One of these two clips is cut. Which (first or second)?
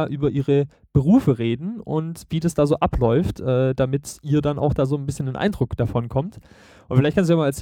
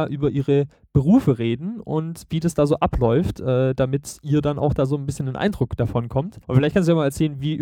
second